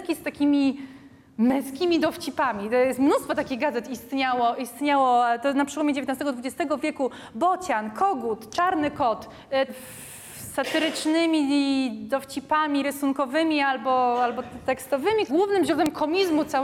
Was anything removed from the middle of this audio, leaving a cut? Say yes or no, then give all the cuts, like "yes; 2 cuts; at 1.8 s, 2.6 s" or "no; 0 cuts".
yes; 2 cuts; at 9.7 s, 15.3 s